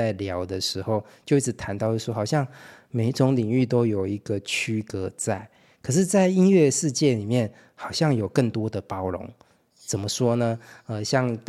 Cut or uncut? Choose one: uncut